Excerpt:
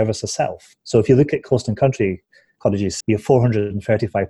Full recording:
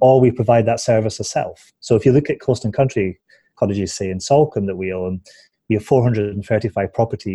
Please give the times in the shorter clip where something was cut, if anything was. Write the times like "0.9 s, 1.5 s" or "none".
3.0 s